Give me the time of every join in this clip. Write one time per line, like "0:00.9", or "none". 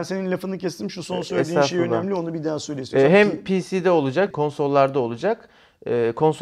0:04.3